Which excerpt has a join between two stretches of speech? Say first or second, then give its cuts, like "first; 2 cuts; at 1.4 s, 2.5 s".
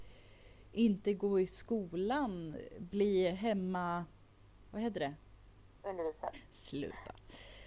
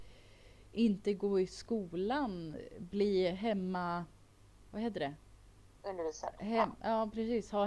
first; 1 cut; at 6.3 s